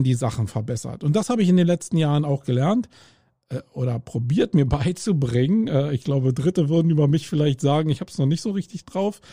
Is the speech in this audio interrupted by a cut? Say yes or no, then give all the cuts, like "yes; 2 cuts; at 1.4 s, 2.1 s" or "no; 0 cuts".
no; 0 cuts